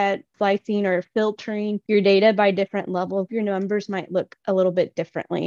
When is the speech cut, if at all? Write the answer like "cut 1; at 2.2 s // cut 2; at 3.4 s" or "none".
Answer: cut 1; at 3.3 s